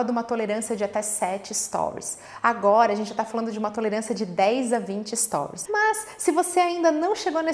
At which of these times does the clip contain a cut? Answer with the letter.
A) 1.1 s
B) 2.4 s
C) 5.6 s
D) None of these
C